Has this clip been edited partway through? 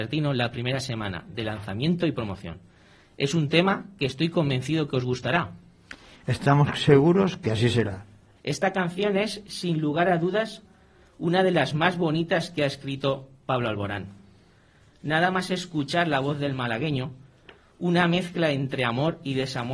yes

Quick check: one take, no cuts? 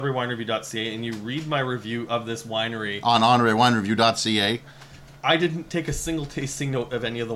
no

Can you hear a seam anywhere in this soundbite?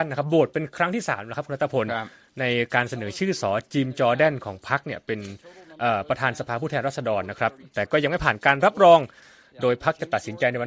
yes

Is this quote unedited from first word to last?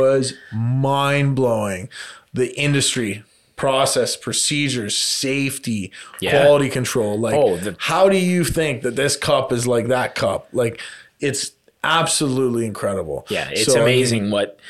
yes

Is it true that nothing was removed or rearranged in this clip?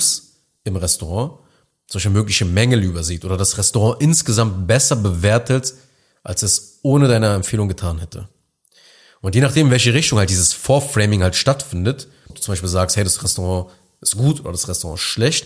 no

